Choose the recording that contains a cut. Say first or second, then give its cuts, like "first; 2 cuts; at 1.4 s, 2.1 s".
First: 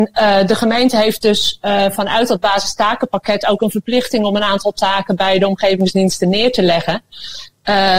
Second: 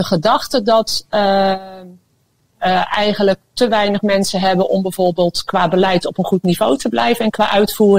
second; 1 cut; at 2.5 s